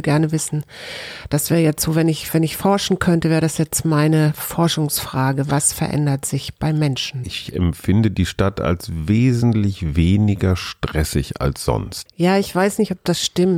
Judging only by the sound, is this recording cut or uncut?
cut